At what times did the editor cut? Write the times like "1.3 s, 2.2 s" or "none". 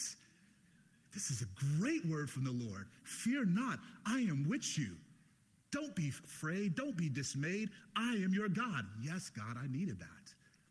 none